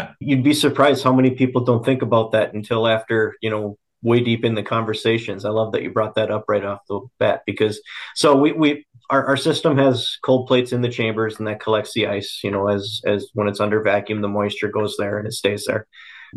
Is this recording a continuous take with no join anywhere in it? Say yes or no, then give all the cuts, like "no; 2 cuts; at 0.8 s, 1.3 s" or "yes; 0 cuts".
yes; 0 cuts